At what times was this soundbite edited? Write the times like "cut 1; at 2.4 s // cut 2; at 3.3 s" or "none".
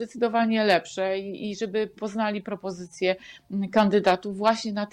none